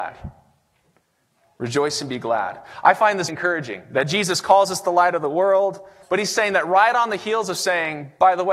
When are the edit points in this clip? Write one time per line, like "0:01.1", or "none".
0:03.3
0:06.0